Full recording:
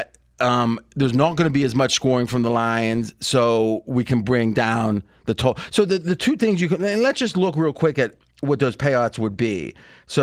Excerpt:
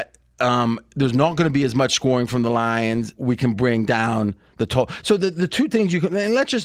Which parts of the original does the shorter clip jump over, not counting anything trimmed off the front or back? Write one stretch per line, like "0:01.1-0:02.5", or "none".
0:03.2-0:03.8